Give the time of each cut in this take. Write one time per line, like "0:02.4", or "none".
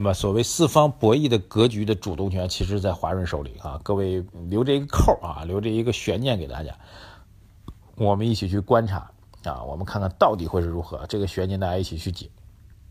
none